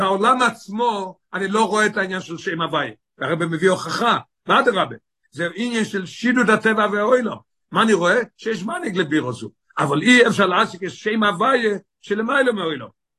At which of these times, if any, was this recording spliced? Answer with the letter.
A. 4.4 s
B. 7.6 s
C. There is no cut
B